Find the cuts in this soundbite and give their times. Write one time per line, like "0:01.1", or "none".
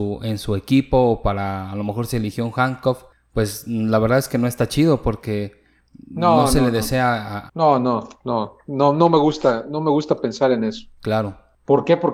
0:07.5